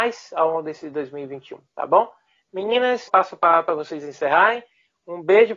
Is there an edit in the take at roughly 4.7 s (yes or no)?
no